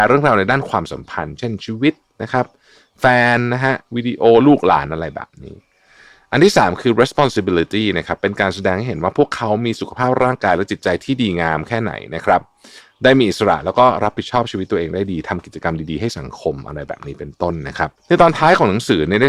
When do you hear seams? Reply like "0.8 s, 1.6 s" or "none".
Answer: 18.0 s